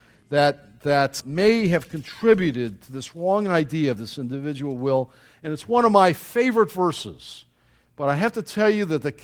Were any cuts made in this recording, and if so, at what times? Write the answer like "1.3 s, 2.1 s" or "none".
1.2 s